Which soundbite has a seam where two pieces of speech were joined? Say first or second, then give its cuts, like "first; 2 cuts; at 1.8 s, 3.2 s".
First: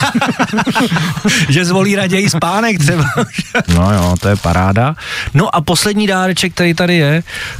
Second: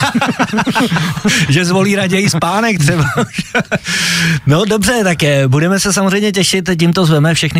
first; 1 cut; at 3.7 s